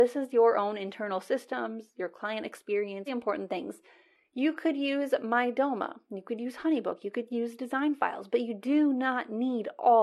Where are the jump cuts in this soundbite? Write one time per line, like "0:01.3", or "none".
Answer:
0:03.1